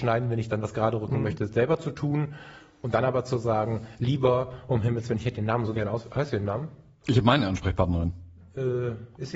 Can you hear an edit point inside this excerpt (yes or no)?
no